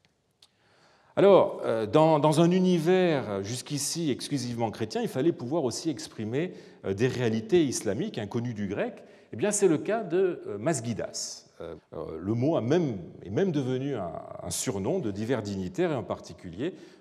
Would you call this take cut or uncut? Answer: cut